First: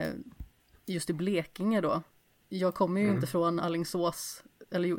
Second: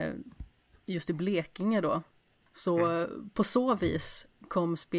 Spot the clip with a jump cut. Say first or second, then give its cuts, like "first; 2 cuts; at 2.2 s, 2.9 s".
second; 1 cut; at 2.5 s